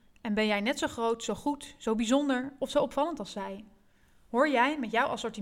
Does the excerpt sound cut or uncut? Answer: uncut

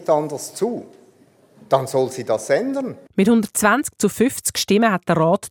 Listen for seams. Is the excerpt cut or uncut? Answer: cut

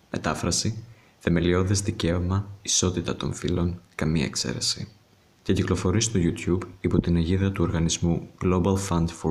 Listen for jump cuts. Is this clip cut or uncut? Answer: uncut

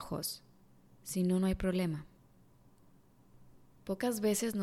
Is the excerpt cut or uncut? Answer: uncut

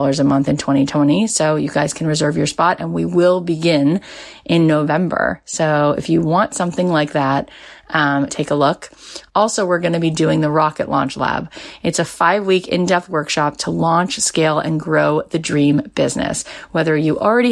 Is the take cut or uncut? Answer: cut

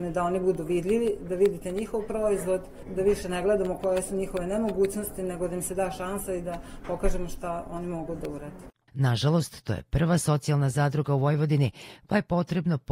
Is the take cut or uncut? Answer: cut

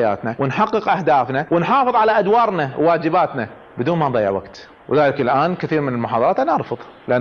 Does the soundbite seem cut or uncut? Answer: uncut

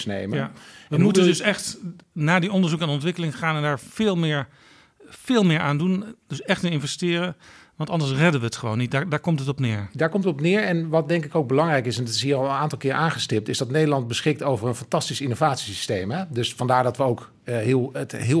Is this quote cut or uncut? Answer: uncut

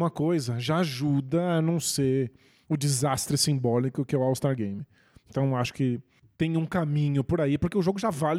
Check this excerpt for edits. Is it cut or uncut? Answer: uncut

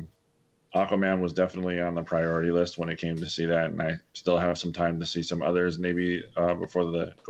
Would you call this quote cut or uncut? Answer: uncut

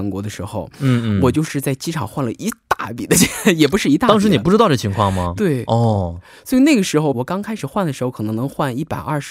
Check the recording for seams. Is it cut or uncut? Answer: cut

